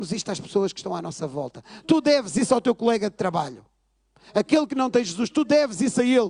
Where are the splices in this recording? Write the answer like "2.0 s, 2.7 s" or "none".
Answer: none